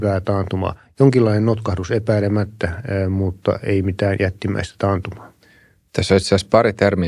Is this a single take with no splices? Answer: yes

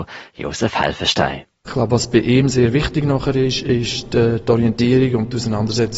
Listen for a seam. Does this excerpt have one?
yes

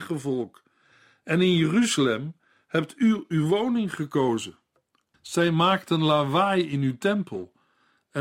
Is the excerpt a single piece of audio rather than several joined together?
no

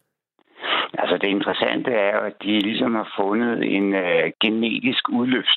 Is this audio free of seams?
yes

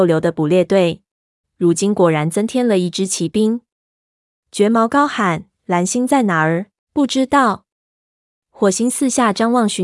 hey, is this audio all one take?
no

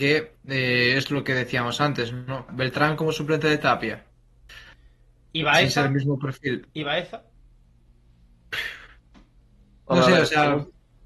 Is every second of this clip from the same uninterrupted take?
no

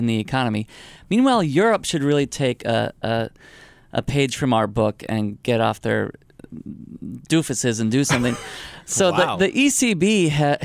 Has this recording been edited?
no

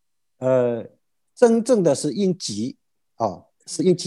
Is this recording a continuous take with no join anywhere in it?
yes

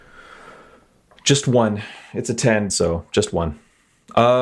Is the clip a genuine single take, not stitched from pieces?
no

